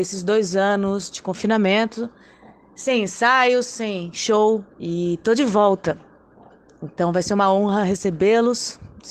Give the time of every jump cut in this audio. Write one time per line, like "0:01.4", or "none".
0:04.7